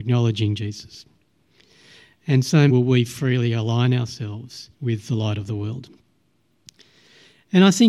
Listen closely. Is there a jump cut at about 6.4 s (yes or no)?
no